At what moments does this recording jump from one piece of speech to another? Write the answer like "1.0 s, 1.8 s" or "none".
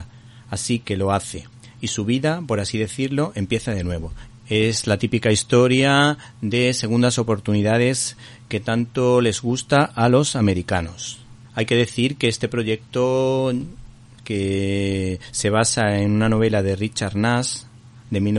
4.3 s, 11.4 s